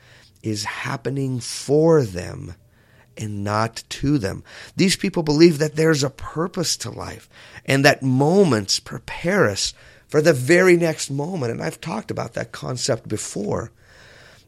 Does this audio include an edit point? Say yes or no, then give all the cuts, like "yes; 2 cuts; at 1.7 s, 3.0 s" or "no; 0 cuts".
no; 0 cuts